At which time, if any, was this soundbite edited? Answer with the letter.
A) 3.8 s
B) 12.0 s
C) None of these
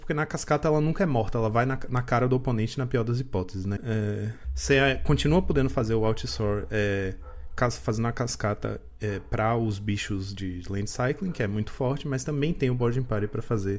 A